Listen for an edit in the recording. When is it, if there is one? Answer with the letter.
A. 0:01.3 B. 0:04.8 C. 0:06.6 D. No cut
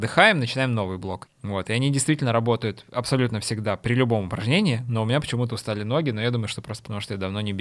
A